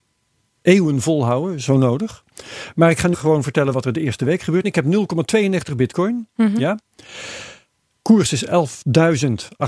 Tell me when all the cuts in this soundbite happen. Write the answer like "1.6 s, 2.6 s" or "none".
3.1 s, 4.6 s